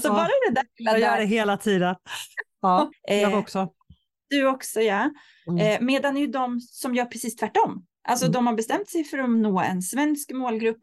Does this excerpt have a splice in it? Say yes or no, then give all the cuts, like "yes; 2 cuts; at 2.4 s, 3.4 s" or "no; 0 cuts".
yes; 1 cut; at 2.9 s